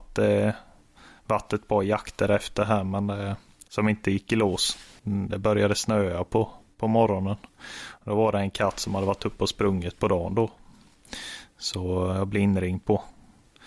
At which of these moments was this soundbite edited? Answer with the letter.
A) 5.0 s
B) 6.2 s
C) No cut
A